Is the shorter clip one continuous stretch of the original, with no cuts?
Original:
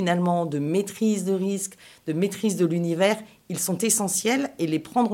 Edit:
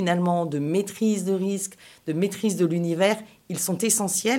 yes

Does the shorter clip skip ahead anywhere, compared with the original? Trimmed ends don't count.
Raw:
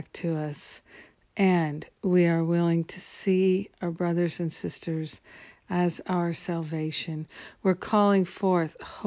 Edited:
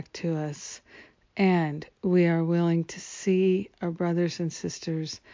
no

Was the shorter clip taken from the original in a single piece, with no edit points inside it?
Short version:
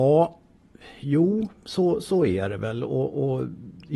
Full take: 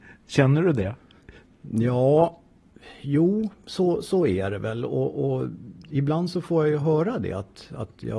yes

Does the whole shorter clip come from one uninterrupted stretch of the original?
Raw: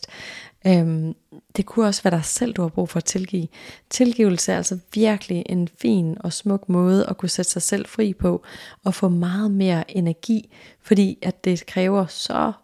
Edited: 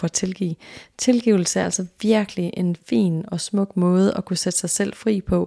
yes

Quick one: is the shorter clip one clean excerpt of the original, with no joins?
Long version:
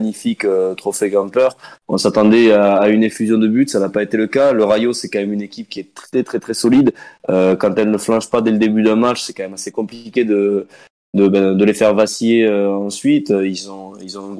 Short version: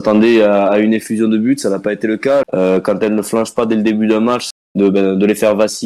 no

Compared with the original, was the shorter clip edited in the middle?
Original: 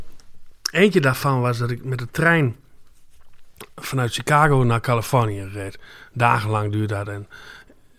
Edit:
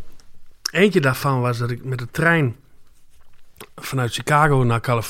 no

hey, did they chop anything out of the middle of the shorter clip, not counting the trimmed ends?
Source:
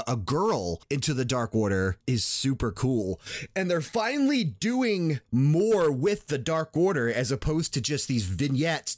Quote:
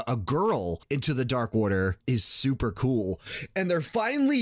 no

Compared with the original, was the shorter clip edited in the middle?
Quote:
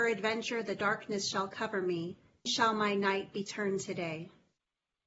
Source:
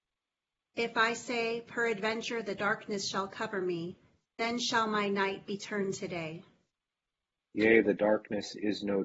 yes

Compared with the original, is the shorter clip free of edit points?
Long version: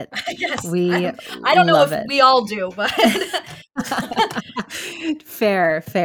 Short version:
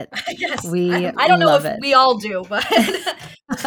no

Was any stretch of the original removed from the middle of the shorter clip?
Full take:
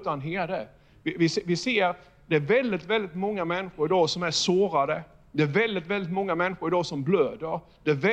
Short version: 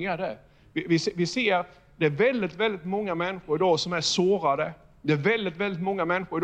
no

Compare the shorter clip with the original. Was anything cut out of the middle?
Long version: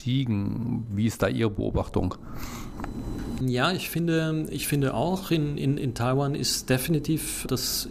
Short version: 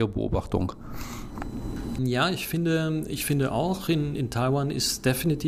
yes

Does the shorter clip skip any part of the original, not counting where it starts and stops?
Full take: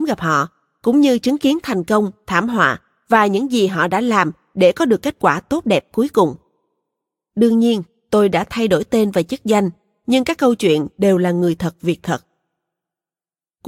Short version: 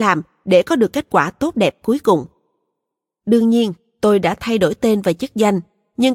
no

